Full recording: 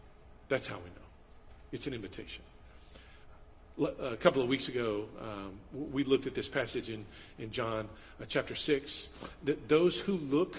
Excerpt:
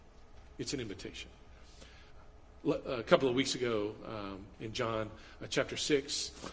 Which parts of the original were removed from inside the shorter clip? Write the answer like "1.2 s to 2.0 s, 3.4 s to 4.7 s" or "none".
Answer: 5.7 s to 7.3 s

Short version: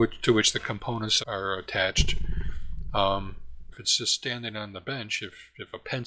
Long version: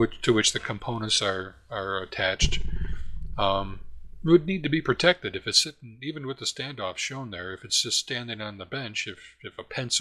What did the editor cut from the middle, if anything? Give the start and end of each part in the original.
1.2 s to 1.6 s, 4.2 s to 7.6 s

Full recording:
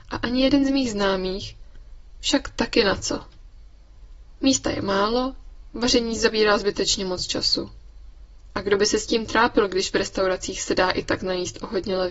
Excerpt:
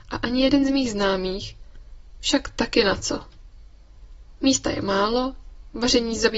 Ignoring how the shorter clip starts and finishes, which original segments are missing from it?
none

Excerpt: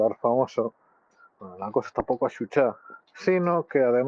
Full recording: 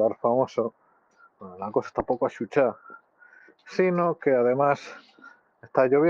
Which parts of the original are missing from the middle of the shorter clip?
3.0 s to 3.5 s

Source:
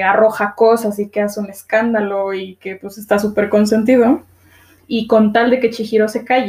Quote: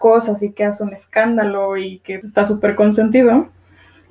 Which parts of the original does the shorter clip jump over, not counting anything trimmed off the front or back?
2.8 s to 3.0 s

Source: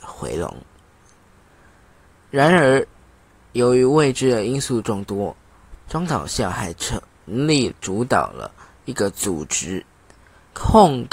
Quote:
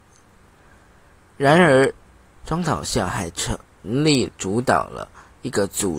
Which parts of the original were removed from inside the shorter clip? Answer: 3.3 s to 5.8 s

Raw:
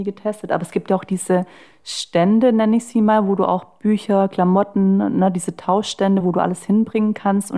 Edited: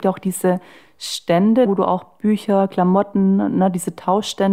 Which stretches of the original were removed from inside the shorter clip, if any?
2.5 s to 3.3 s

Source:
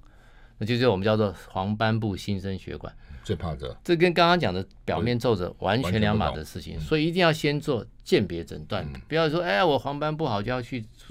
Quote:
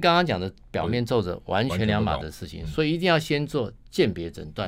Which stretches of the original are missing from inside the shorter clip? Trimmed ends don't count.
none

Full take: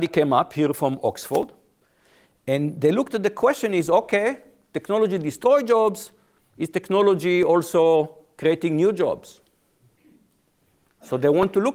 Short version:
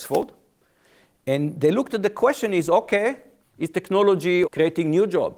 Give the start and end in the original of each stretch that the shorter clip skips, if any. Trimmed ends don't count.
4.6 s to 6.4 s, 7.4 s to 8.3 s

